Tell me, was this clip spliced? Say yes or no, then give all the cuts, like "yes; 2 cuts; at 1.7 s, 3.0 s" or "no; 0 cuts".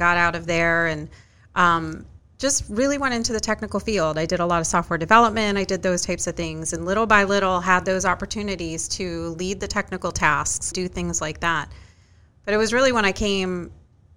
yes; 1 cut; at 10.7 s